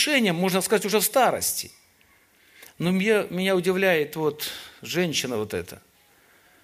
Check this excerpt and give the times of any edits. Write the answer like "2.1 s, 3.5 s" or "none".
none